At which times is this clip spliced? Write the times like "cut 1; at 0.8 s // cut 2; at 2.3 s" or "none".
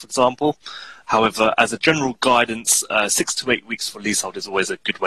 cut 1; at 1.0 s